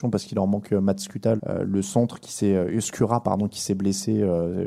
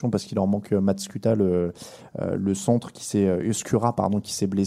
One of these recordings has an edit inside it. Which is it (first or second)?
first